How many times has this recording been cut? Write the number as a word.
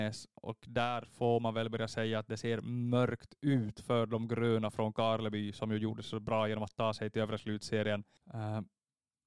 one